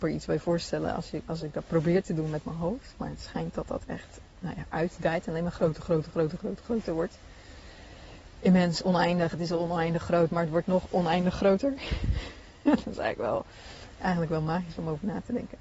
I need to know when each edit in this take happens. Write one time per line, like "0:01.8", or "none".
0:04.7